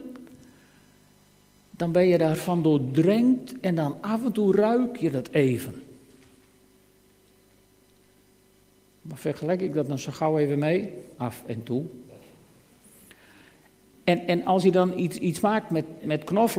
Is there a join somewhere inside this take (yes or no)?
yes